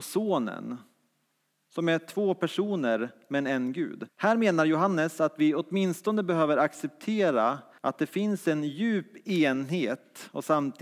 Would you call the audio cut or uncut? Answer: cut